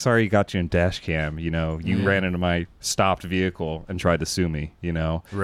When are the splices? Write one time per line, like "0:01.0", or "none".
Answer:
none

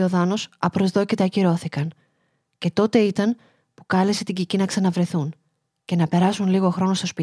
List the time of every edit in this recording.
none

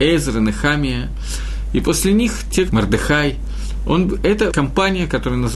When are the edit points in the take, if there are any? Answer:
0:02.7
0:04.5

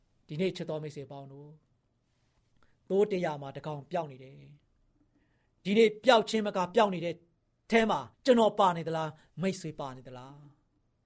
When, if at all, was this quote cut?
0:08.1

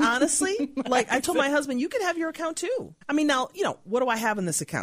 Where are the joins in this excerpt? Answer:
0:03.0

